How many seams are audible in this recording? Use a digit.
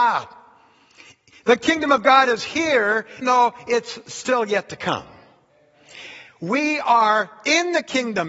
1